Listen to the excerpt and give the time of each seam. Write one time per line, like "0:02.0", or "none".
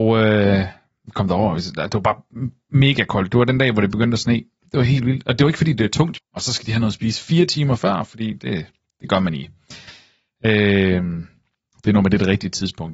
0:04.6
0:06.2